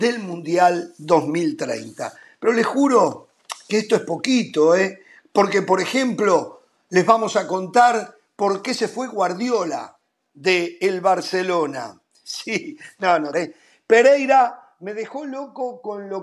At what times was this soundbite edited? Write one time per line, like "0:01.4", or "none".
0:12.2
0:13.3